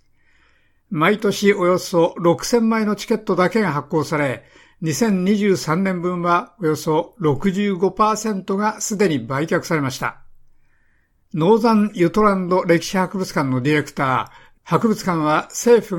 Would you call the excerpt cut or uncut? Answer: cut